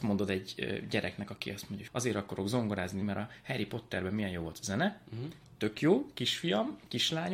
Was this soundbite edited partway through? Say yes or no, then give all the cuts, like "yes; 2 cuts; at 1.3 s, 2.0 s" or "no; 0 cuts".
yes; 2 cuts; at 1.9 s, 3.0 s